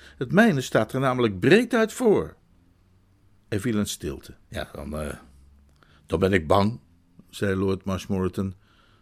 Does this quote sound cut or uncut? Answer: cut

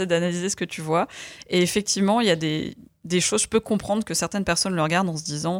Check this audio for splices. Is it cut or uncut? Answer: uncut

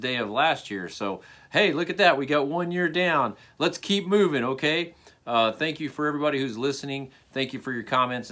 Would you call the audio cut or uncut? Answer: uncut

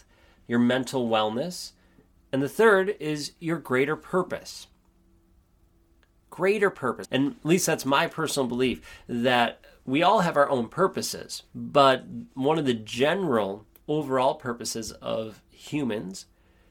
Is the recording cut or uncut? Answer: cut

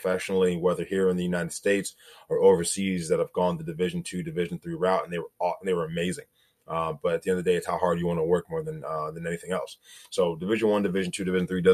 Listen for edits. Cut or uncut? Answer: uncut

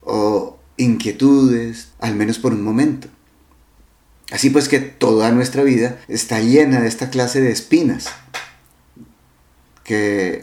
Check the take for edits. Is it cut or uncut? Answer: cut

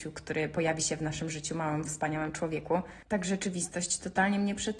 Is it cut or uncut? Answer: uncut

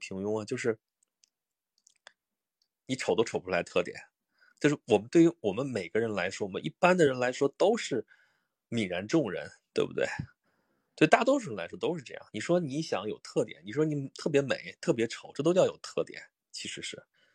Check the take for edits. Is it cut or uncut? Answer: uncut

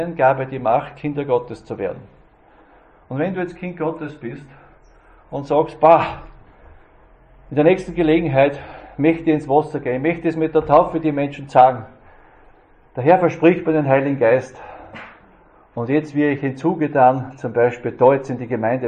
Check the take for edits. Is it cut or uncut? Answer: uncut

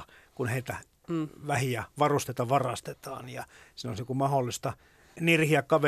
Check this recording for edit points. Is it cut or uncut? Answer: uncut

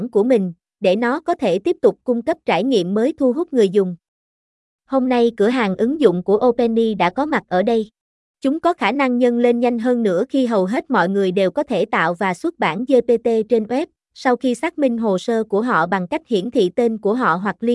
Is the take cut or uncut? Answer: cut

